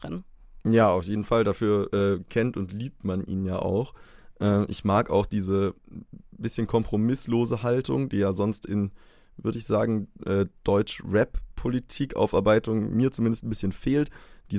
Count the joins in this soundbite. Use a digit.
0